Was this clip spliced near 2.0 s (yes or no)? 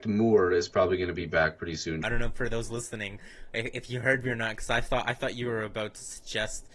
yes